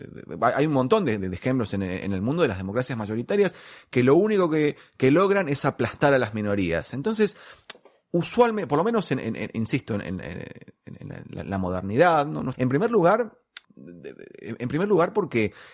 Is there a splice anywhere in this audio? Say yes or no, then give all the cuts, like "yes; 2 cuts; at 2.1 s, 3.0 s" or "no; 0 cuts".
yes; 3 cuts; at 1.2 s, 12.5 s, 13.6 s